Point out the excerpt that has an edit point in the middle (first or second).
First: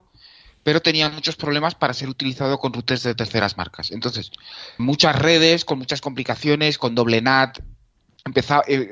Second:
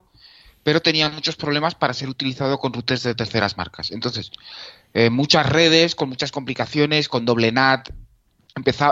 first